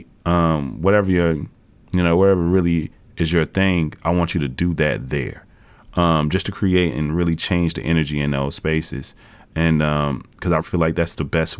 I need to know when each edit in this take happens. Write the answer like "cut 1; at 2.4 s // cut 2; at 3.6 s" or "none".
cut 1; at 10.6 s